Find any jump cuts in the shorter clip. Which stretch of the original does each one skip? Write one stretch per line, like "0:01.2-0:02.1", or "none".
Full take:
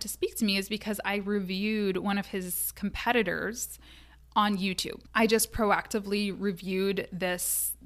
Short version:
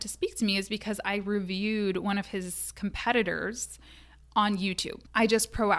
none